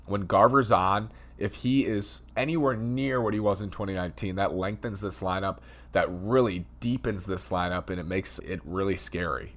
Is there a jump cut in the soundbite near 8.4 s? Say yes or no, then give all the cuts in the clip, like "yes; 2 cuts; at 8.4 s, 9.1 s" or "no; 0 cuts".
yes; 1 cut; at 8.4 s